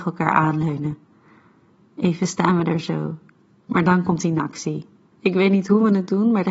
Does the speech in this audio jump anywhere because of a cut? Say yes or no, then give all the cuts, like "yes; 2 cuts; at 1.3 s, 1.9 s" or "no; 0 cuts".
yes; 1 cut; at 5.1 s